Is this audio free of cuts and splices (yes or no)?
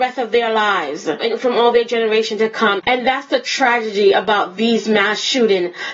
no